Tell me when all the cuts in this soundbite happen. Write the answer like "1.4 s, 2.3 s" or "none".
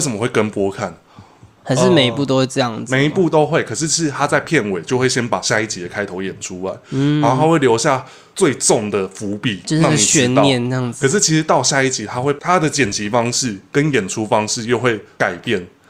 1.6 s